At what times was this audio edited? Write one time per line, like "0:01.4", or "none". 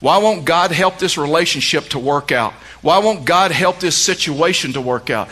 none